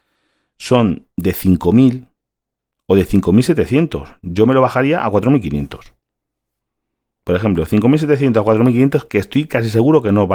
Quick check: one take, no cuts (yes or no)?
yes